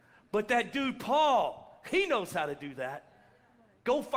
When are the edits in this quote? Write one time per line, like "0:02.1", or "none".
none